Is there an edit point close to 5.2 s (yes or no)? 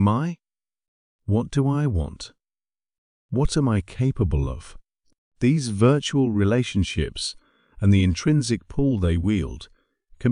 yes